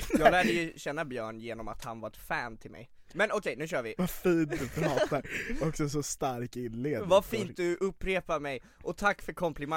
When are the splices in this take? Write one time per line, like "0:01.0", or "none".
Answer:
0:04.0